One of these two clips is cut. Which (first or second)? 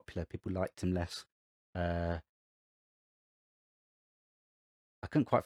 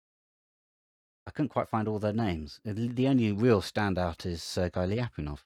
first